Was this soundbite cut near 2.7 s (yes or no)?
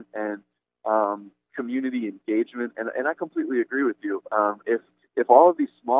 no